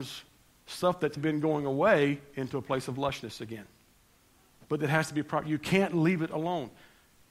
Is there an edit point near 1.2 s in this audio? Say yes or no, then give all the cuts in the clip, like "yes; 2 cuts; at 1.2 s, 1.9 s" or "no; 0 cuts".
yes; 1 cut; at 1.2 s